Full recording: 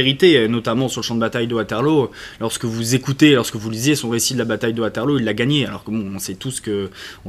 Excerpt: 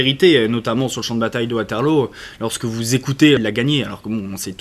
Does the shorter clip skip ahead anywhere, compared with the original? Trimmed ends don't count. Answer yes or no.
yes